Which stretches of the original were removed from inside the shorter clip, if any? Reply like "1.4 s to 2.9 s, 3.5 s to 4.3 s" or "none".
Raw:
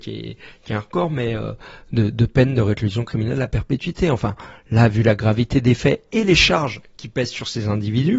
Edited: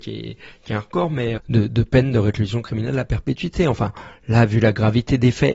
1.4 s to 1.8 s